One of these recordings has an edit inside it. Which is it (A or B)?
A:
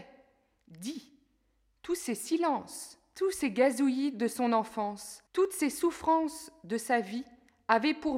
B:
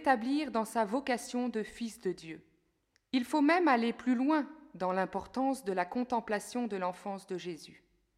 A